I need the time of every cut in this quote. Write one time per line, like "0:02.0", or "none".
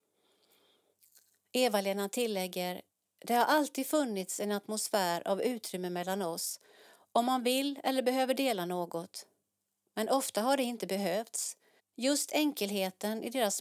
0:11.8

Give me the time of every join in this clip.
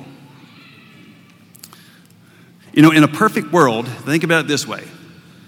none

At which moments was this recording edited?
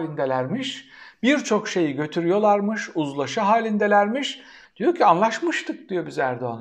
0:04.6

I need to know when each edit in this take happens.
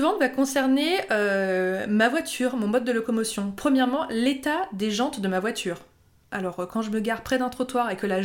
none

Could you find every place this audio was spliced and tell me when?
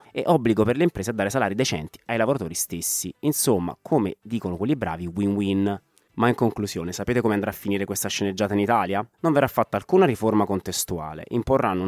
none

